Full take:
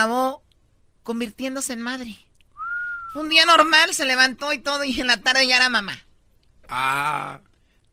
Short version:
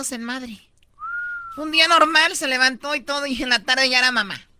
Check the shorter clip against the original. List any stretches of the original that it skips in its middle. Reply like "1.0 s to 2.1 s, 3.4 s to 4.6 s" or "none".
none